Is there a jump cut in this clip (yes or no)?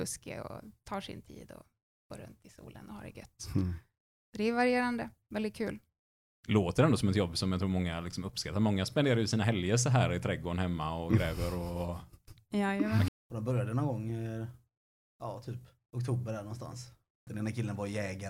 yes